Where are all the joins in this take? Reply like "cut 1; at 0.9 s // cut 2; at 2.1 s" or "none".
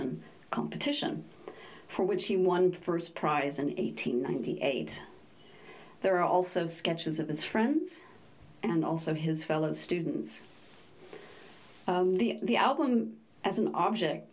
cut 1; at 6.0 s

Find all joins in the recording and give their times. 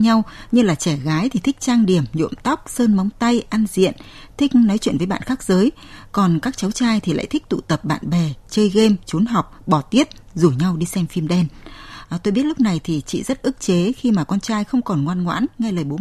none

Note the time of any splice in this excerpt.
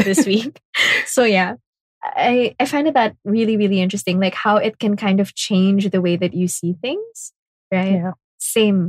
none

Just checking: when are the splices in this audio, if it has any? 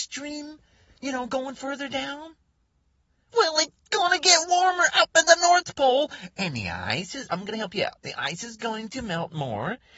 none

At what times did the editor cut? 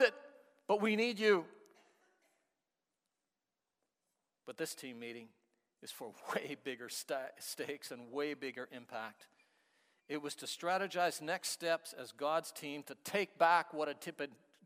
none

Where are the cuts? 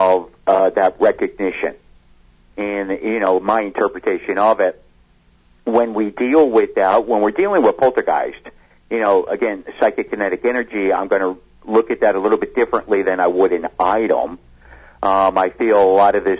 none

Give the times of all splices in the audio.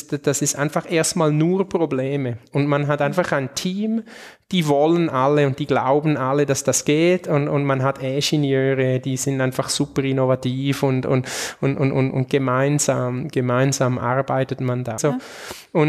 cut 1; at 15.0 s

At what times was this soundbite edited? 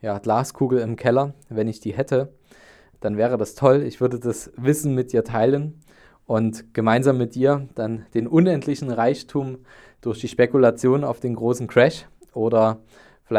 none

